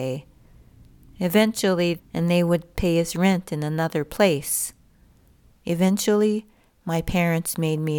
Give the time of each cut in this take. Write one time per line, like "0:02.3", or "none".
0:02.0
0:05.5